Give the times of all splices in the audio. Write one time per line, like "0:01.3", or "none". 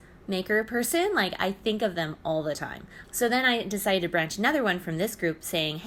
0:03.0